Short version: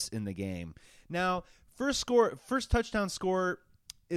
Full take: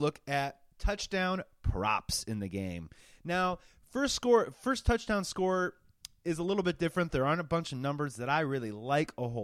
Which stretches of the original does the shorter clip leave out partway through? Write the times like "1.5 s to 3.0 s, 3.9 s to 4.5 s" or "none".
none